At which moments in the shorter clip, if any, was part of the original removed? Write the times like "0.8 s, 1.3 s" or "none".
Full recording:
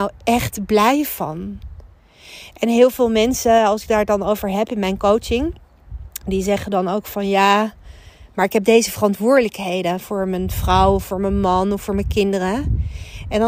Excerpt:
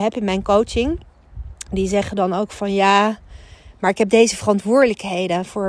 none